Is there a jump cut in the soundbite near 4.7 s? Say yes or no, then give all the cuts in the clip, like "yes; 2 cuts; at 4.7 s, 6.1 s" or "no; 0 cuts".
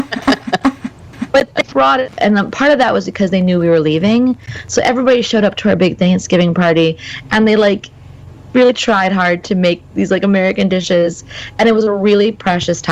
no; 1 cut; at 2.2 s